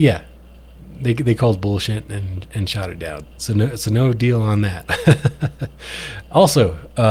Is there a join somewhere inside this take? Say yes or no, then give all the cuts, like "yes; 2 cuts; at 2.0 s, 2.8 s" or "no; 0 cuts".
yes; 1 cut; at 3.2 s